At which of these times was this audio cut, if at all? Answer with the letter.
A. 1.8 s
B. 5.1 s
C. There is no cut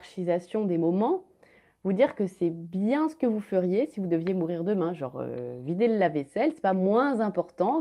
C